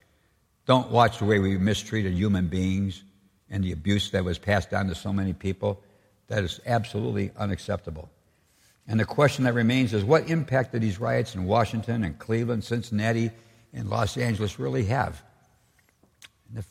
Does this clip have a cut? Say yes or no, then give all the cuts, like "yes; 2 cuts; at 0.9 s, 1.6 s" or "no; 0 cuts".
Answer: no; 0 cuts